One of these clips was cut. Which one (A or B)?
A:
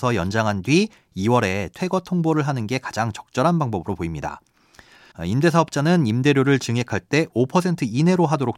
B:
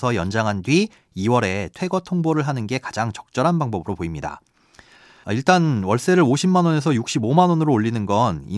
A